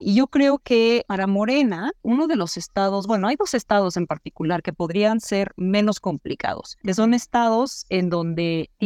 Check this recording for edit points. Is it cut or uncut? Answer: uncut